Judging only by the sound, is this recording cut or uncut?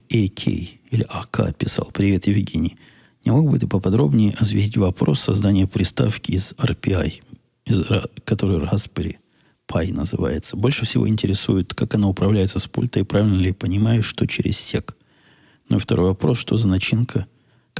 uncut